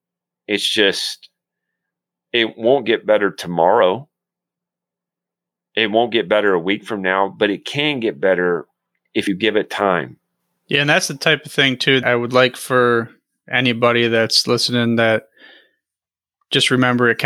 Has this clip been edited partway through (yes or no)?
yes